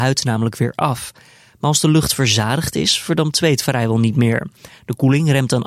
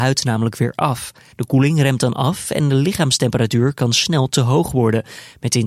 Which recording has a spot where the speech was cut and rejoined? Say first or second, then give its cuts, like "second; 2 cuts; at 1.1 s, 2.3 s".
second; 1 cut; at 1.3 s